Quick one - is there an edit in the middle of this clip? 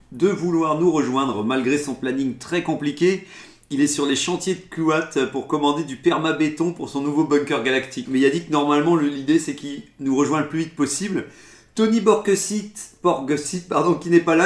yes; 1 cut; at 8.1 s

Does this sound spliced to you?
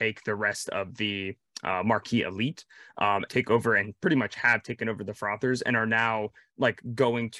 yes; 1 cut; at 3.3 s

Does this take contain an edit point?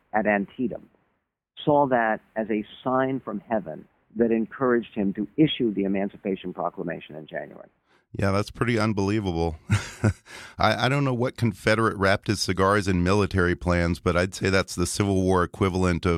no; 0 cuts

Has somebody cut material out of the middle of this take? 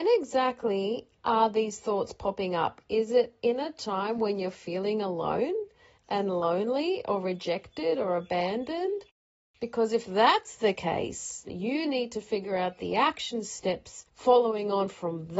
yes; 1 cut; at 11.5 s

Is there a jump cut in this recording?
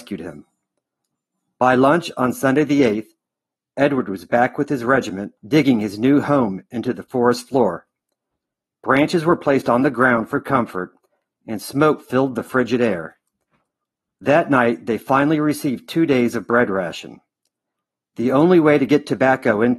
yes; 1 cut; at 5.4 s

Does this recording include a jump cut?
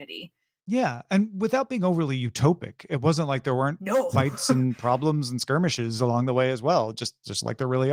no; 0 cuts

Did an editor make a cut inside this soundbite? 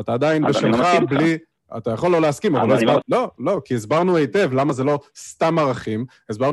yes; 1 cut; at 3.0 s

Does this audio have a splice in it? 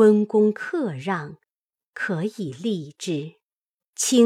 no; 0 cuts

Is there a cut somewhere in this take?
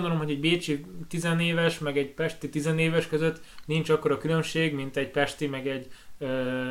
no; 0 cuts

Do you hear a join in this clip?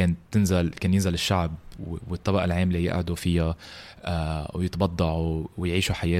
yes; 1 cut; at 1.8 s

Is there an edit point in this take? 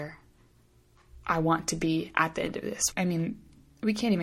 yes; 1 cut; at 2.9 s

